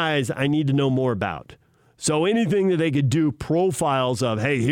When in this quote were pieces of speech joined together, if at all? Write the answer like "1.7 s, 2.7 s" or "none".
none